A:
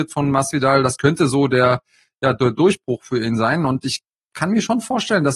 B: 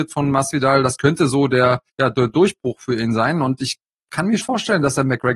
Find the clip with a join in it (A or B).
B